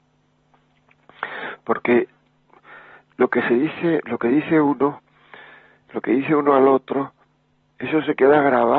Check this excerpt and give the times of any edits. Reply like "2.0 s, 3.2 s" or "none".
none